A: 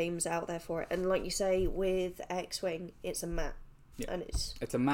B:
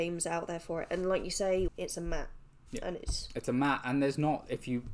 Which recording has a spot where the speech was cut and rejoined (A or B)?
B